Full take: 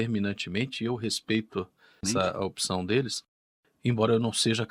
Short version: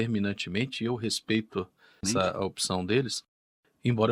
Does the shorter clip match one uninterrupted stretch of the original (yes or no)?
yes